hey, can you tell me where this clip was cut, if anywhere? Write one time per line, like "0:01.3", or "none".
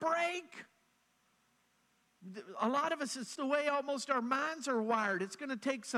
0:03.4